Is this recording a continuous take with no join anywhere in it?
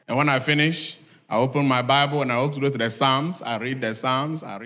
yes; 0 cuts

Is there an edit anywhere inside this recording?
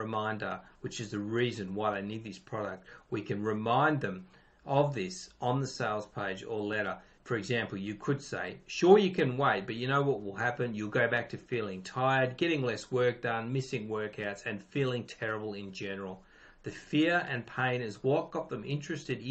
no; 0 cuts

